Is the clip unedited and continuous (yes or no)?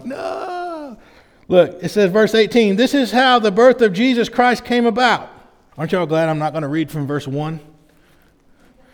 no